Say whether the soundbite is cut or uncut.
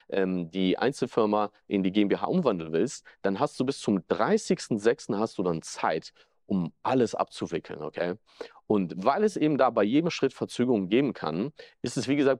uncut